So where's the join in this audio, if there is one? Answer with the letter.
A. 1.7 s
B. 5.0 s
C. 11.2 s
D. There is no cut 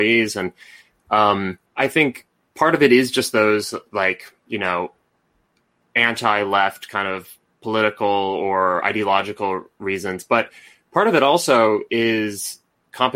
A